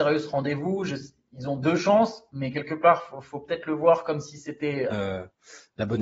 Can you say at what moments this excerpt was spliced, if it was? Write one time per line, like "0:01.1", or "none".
0:04.9